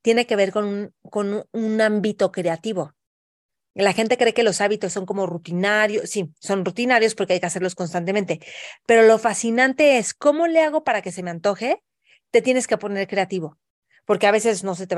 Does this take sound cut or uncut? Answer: uncut